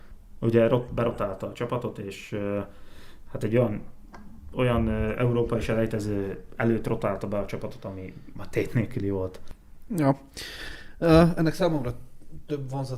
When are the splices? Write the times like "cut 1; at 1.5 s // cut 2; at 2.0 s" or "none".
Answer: cut 1; at 9.9 s